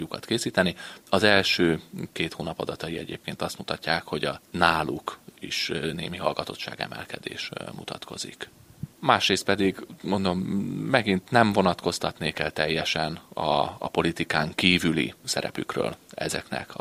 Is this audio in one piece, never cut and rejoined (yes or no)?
no